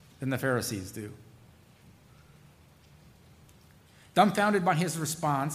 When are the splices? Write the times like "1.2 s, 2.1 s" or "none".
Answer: none